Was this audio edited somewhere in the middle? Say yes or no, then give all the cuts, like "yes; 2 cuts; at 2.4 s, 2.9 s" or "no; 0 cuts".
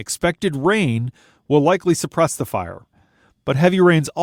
no; 0 cuts